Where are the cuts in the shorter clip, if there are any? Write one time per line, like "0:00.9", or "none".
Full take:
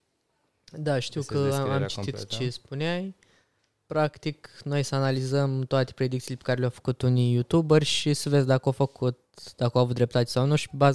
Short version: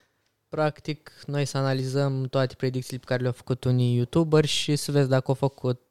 none